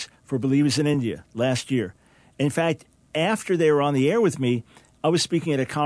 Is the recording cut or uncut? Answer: uncut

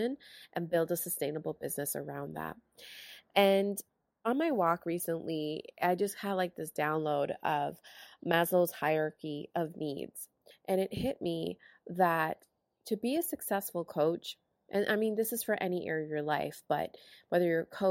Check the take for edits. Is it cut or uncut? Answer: uncut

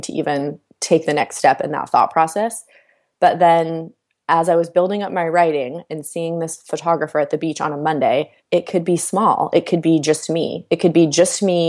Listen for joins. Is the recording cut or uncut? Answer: cut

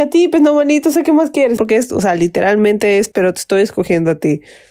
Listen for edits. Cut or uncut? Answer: cut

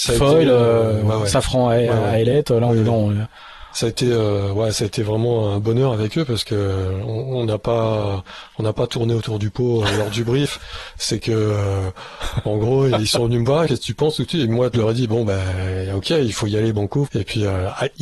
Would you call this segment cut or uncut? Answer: cut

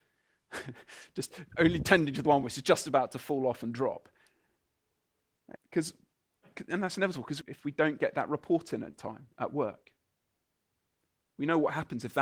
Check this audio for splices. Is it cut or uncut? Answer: cut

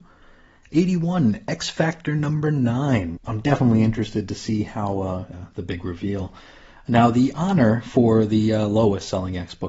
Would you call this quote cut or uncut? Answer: cut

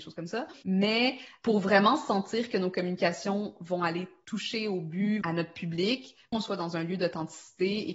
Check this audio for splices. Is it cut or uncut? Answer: cut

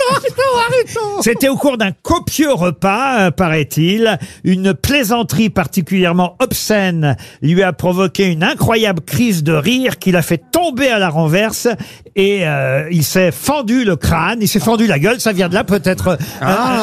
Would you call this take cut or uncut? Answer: uncut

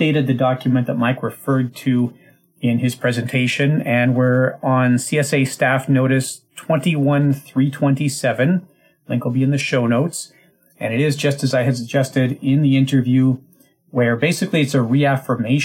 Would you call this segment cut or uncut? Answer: cut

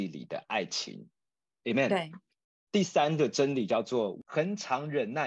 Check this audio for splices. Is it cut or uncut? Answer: cut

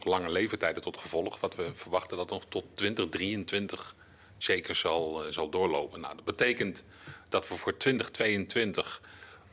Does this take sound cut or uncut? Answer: uncut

